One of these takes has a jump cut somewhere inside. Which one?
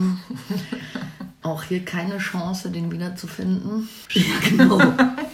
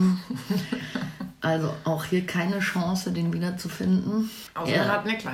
first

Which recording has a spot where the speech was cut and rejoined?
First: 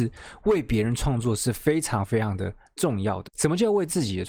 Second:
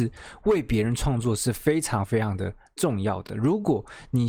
first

